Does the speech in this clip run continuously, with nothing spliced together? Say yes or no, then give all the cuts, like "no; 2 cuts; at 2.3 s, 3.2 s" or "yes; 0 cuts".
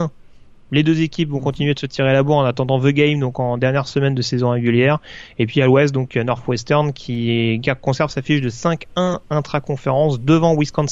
yes; 0 cuts